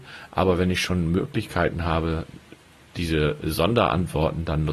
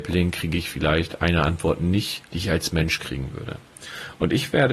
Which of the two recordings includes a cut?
second; 1 cut; at 2.3 s

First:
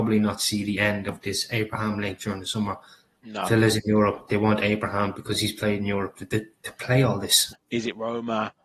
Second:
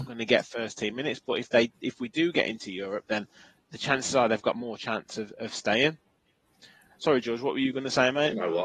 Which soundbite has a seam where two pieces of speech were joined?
first; 1 cut; at 7.5 s

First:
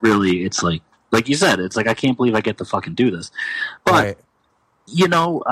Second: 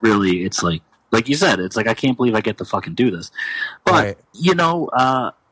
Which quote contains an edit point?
second; 1 cut; at 4.3 s

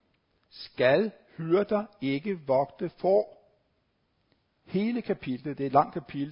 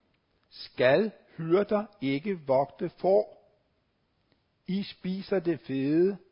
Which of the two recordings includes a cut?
first; 1 cut; at 4.5 s

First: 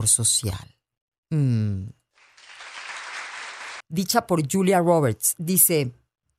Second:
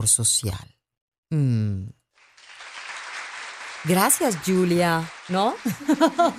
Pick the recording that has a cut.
first; 1 cut; at 3.8 s

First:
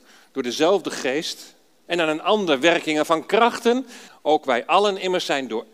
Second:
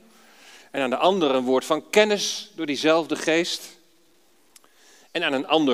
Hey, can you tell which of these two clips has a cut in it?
first; 2 cuts; at 1.9 s, 4.1 s

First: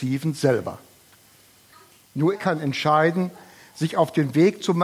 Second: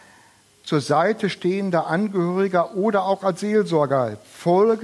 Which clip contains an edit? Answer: first; 1 cut; at 2.3 s

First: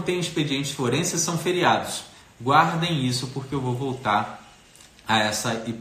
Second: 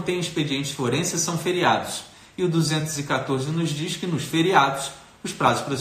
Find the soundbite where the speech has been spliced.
first; 1 cut; at 2.2 s

